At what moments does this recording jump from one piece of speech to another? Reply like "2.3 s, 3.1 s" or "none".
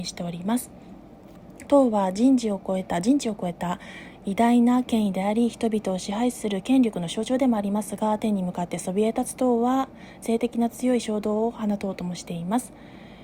1.7 s, 10.2 s